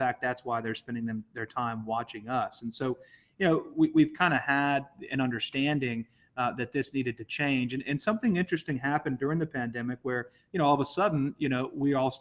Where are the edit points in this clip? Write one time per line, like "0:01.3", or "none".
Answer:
none